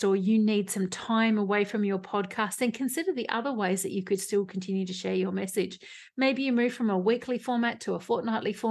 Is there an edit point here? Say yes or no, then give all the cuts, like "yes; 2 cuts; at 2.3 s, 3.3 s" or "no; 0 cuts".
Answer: no; 0 cuts